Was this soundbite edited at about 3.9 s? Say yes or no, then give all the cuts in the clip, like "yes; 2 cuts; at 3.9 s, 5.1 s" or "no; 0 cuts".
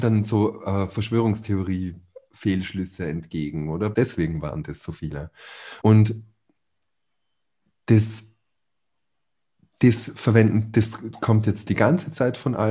yes; 2 cuts; at 3.9 s, 5.8 s